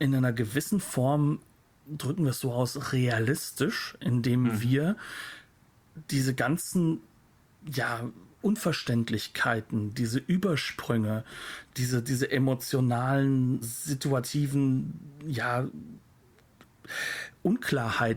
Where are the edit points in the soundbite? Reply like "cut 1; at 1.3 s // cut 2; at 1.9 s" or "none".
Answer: cut 1; at 13.6 s